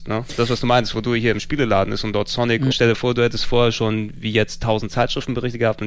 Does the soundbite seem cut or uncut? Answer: cut